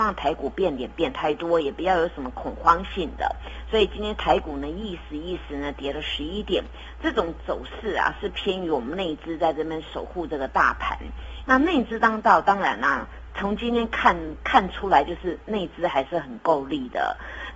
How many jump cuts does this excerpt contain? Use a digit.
1